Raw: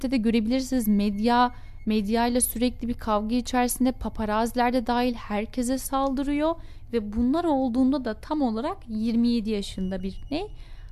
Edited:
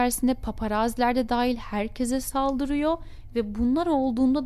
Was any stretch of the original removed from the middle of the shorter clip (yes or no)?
no